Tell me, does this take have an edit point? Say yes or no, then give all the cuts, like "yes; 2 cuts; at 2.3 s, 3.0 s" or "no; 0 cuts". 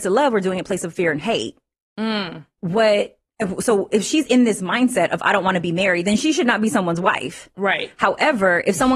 yes; 1 cut; at 2.6 s